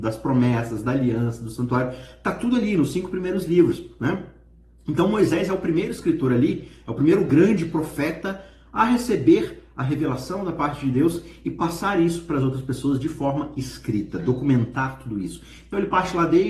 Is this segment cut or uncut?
uncut